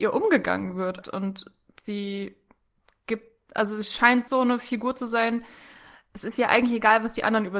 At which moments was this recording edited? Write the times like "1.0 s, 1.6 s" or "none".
1.0 s, 4.3 s